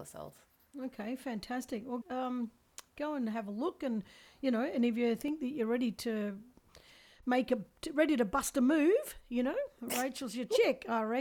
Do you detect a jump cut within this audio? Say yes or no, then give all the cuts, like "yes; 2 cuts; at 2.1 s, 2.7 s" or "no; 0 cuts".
yes; 1 cut; at 2.0 s